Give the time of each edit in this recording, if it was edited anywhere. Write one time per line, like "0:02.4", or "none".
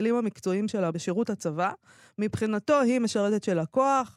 0:00.9